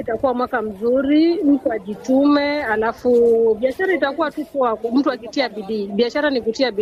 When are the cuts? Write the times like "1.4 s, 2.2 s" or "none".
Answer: none